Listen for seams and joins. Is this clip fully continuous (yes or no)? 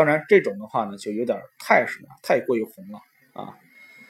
yes